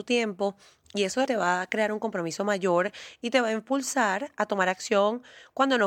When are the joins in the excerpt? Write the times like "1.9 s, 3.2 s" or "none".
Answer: 1.3 s